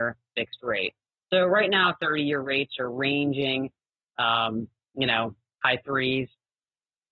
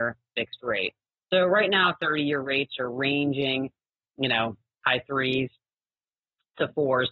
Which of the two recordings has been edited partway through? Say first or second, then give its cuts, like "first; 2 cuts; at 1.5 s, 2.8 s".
second; 1 cut; at 4.0 s